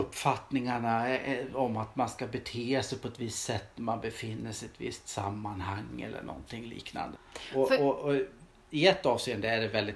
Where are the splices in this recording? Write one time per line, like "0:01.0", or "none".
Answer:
0:07.2